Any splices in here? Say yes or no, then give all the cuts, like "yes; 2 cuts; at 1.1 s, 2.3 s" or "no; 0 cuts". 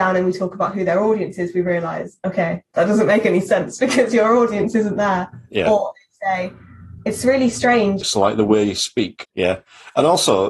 yes; 2 cuts; at 8.0 s, 9.2 s